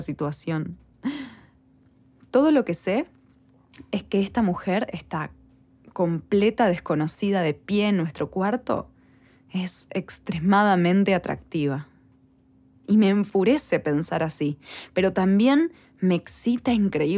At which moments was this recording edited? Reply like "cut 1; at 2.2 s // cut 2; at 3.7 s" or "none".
none